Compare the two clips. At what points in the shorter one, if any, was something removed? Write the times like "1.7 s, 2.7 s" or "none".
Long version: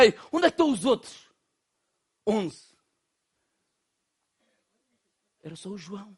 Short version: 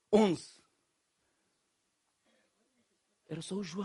none